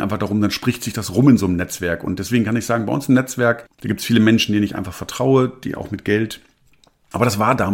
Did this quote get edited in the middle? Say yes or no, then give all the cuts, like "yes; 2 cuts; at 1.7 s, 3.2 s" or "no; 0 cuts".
no; 0 cuts